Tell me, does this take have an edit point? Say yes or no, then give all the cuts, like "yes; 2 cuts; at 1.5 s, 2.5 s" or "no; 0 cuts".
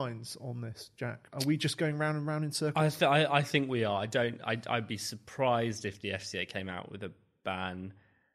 no; 0 cuts